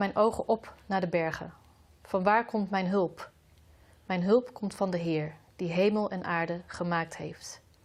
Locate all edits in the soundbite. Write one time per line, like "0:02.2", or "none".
none